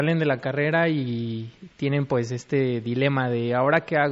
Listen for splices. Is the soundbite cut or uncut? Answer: uncut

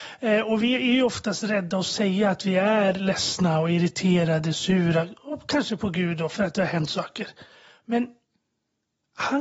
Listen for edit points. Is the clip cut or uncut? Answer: uncut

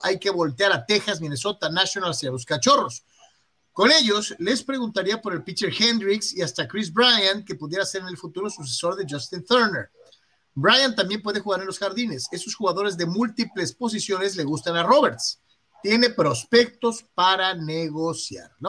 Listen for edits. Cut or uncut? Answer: uncut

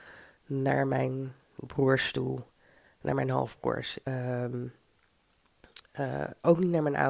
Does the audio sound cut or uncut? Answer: cut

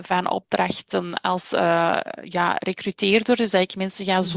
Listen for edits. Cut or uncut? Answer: uncut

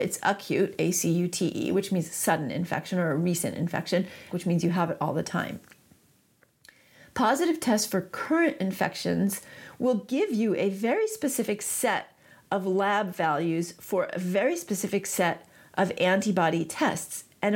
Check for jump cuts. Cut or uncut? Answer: cut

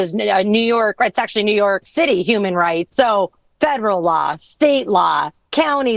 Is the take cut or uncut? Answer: cut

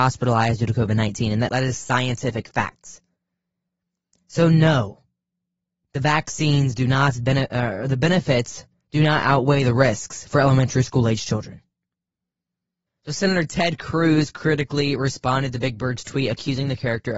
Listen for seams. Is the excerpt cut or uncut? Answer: cut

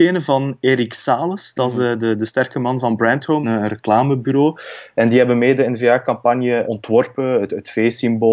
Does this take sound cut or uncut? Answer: cut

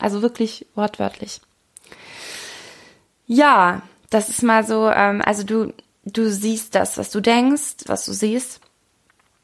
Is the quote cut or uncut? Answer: cut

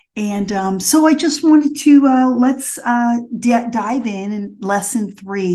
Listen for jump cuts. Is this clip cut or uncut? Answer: uncut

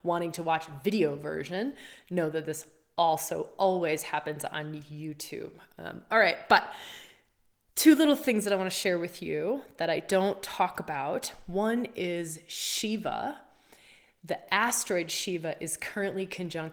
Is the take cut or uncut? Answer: uncut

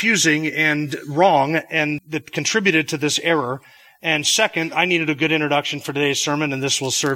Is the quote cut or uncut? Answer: cut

